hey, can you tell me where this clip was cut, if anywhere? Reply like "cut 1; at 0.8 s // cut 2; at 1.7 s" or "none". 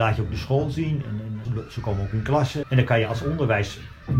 cut 1; at 1.4 s // cut 2; at 2.6 s